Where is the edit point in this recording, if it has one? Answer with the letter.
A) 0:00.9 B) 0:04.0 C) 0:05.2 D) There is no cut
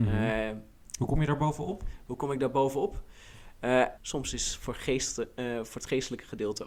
B